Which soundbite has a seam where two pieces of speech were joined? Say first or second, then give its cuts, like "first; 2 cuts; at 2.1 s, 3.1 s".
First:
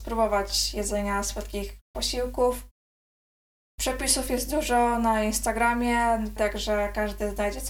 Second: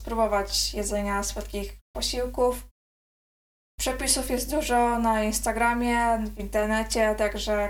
first; 1 cut; at 6.4 s